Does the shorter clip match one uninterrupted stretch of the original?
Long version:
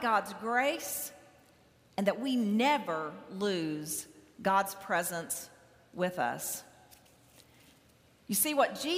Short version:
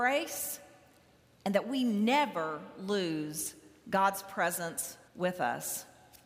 no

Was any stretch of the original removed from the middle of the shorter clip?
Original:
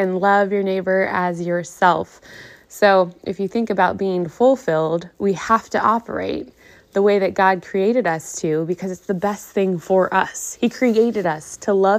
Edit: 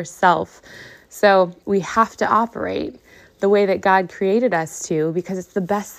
yes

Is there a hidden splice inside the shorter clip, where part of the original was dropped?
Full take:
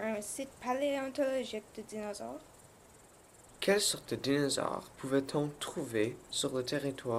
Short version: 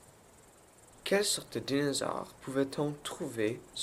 no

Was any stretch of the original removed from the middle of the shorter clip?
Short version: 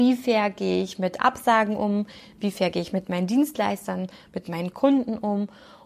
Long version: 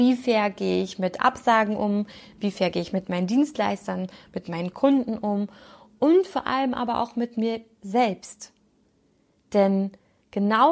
no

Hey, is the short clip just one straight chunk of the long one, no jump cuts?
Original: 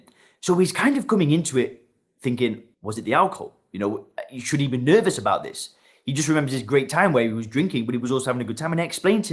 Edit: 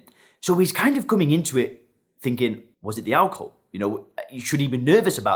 yes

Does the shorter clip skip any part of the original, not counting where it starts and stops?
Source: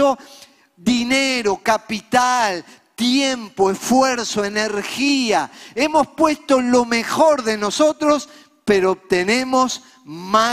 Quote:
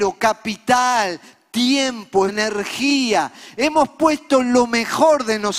yes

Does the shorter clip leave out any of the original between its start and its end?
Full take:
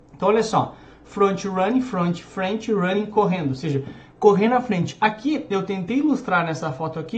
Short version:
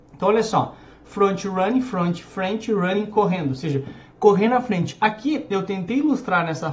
no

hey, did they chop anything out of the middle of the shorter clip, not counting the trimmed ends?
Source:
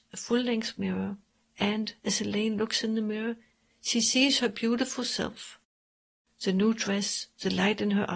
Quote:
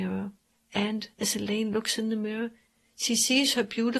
no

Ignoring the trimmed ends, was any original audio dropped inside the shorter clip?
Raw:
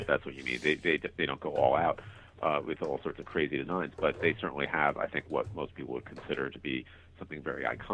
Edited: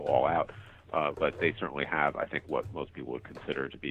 yes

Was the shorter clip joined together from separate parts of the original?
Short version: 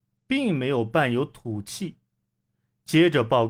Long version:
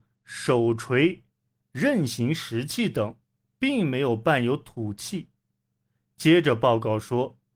no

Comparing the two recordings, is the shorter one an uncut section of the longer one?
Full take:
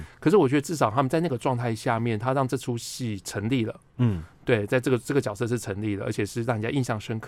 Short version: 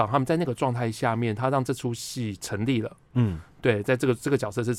yes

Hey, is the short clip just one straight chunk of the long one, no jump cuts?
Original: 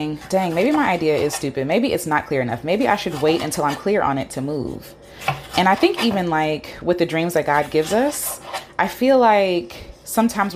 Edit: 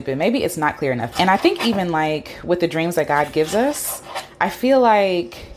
no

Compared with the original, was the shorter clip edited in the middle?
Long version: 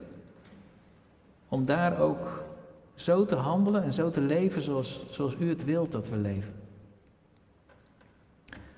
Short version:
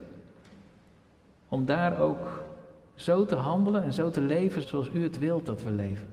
yes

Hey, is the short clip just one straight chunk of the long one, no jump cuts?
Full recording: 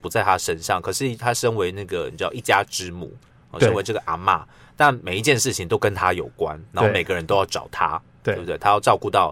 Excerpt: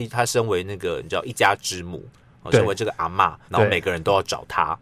no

